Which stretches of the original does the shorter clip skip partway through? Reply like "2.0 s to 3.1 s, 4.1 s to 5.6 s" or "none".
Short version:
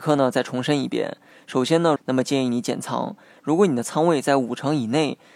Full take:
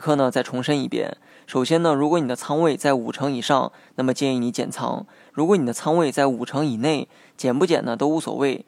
2.0 s to 3.9 s